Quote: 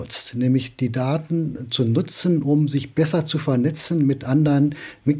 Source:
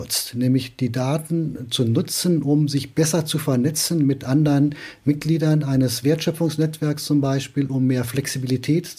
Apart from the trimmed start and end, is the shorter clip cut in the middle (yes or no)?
no